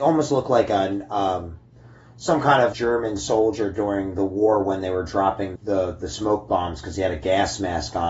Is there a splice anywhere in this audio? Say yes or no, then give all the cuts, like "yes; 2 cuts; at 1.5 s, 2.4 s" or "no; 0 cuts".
yes; 2 cuts; at 2.7 s, 5.6 s